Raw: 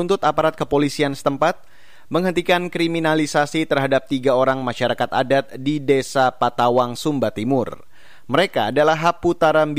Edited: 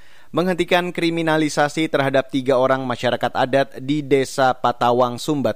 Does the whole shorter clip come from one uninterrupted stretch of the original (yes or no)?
yes